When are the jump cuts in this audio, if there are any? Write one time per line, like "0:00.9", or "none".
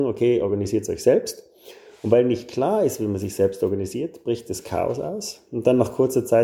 none